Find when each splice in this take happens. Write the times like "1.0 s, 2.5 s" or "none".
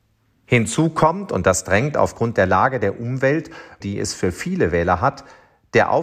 3.8 s